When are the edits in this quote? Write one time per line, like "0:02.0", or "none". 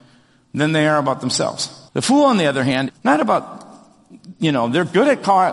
0:01.9
0:02.9